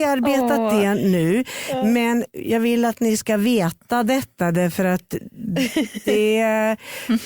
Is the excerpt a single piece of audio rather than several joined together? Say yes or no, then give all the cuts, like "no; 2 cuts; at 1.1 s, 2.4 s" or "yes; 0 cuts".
yes; 0 cuts